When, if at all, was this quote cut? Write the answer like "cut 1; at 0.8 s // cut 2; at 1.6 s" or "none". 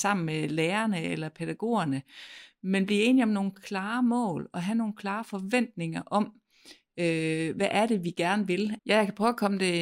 cut 1; at 8.8 s